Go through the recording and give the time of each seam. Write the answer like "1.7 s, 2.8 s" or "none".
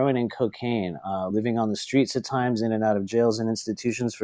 none